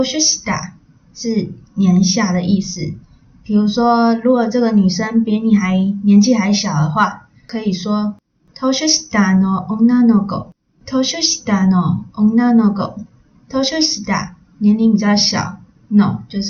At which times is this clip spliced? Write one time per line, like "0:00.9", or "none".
none